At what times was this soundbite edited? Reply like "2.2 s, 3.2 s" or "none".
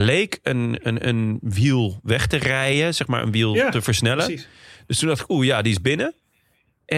none